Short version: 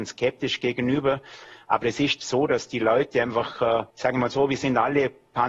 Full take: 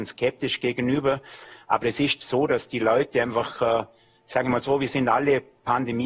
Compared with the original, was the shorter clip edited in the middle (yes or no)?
yes